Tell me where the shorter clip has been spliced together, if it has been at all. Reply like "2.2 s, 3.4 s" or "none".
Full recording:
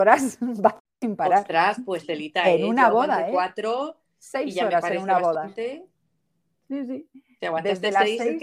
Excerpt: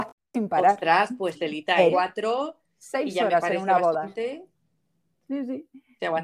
1.9 s